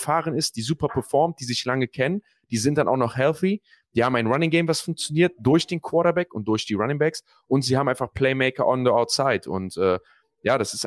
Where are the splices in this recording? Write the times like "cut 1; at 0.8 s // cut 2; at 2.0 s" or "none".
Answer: none